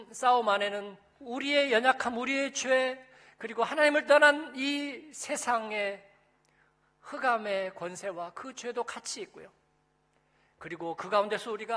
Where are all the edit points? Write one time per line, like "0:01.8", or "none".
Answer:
none